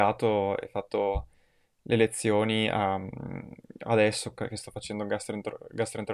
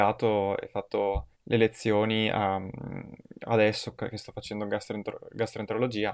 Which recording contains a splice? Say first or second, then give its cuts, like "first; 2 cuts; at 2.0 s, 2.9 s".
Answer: second; 1 cut; at 1.3 s